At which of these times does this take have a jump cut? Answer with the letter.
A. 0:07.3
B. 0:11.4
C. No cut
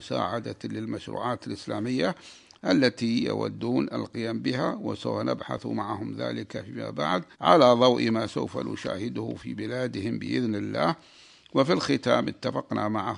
A